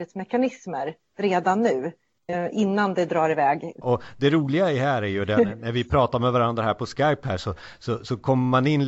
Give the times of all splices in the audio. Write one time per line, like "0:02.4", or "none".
0:03.8